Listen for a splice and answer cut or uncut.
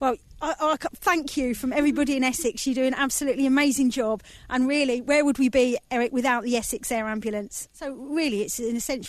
cut